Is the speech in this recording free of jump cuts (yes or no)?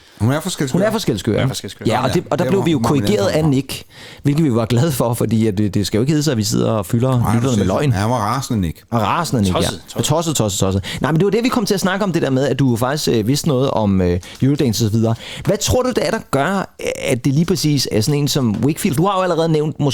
no